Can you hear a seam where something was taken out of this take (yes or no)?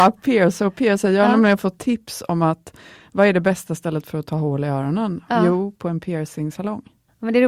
no